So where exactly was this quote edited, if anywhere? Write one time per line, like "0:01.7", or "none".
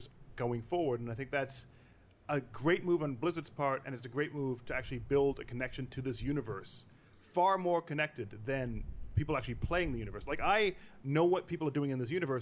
none